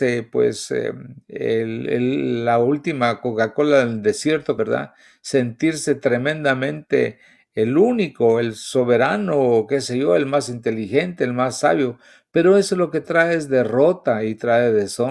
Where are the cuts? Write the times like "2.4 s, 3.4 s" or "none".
4.6 s